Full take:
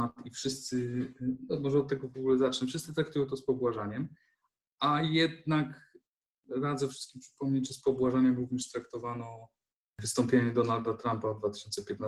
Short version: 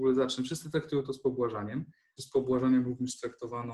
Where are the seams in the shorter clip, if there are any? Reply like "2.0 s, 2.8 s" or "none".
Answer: 2.2 s